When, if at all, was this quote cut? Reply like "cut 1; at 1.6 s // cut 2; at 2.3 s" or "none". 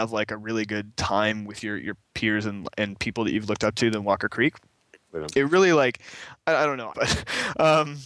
cut 1; at 6.9 s